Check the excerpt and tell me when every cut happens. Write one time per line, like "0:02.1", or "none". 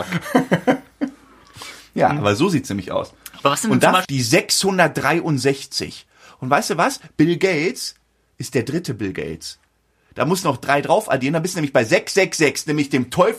0:04.0

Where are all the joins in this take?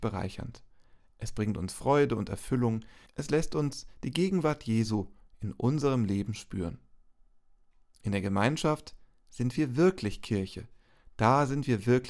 0:03.1

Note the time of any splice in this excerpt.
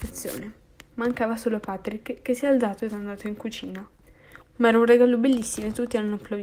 0:00.9
0:04.4

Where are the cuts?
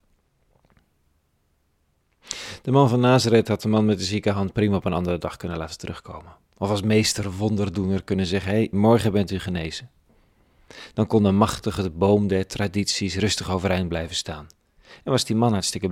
0:08.7

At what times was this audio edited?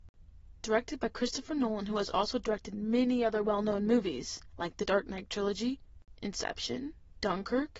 none

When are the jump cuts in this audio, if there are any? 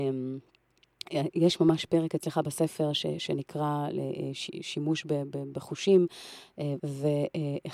0:06.8

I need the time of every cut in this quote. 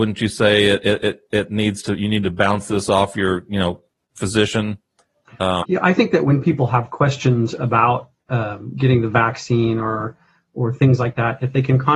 0:05.6

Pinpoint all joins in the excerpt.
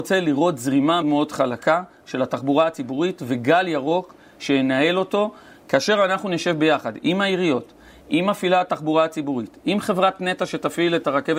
0:01.0
0:05.6

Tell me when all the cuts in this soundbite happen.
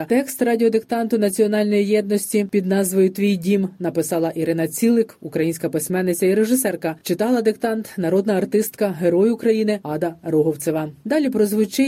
none

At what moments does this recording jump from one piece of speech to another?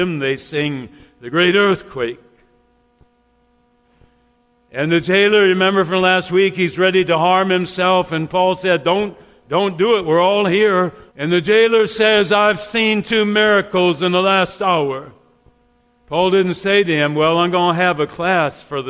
0:11.1
0:16.0

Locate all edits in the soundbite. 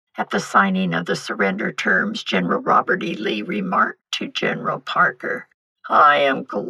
none

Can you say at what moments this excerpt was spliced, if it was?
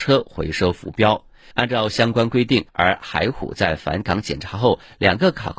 0:01.5
0:02.7

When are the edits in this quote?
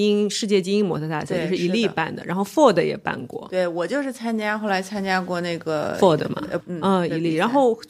0:06.6

